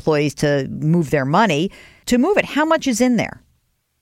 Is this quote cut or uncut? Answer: cut